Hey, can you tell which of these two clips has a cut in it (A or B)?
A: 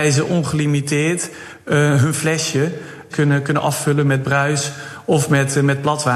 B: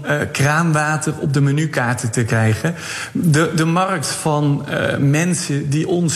A